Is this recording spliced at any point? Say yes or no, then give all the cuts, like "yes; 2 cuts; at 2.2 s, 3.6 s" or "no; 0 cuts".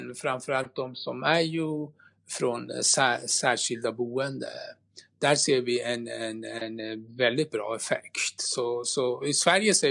no; 0 cuts